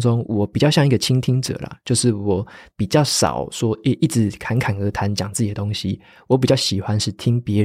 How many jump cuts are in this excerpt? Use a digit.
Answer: 0